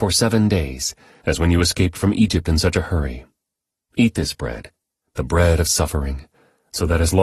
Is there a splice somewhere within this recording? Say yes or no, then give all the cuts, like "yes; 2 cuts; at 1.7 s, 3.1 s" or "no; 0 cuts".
yes; 1 cut; at 1.2 s